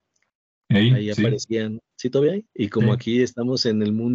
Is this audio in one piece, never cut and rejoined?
no; 1 cut; at 2.5 s

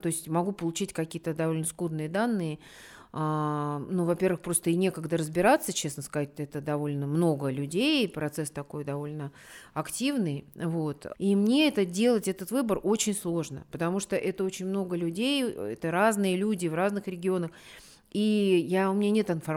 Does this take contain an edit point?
yes; 1 cut; at 11.1 s

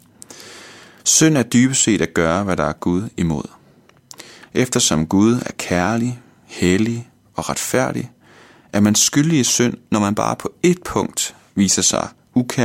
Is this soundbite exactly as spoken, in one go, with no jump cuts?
no; 1 cut; at 1.0 s

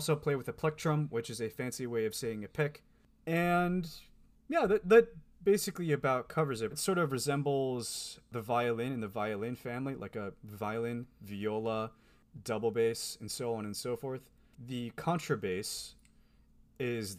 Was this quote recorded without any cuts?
no; 2 cuts; at 6.7 s, 14.5 s

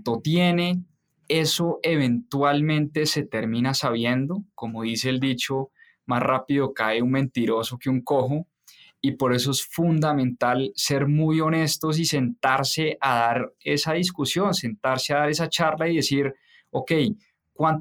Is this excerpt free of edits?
yes; 0 cuts

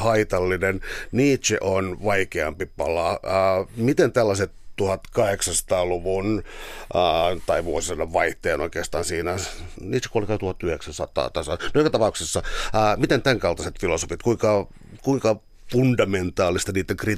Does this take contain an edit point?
yes; 1 cut; at 9.7 s

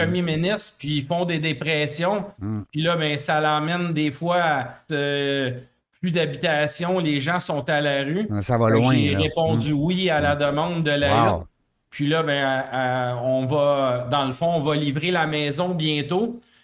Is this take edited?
yes; 1 cut; at 4.9 s

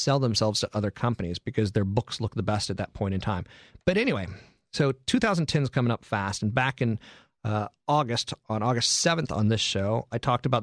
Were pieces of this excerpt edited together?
no; 0 cuts

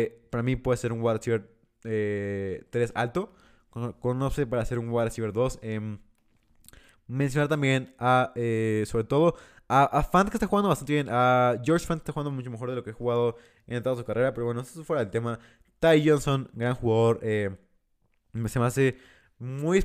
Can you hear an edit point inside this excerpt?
no; 0 cuts

